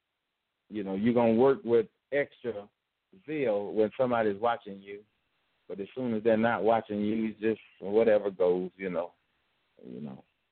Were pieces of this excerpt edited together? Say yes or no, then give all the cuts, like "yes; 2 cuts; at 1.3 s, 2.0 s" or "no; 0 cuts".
no; 0 cuts